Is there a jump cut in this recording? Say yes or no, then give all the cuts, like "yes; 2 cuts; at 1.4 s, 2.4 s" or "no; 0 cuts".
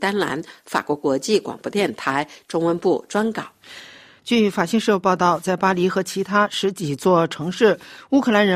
yes; 1 cut; at 4.2 s